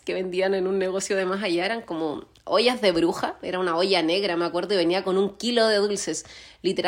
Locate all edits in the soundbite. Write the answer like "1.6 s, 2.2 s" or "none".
none